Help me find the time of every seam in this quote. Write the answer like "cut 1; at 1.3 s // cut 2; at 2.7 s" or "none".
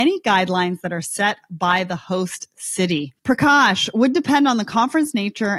cut 1; at 3.2 s